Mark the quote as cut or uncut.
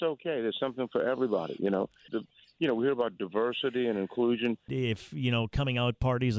cut